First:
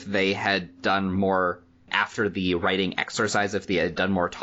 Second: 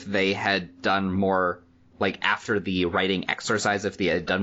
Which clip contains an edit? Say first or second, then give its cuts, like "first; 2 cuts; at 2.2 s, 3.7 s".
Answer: first; 1 cut; at 1.9 s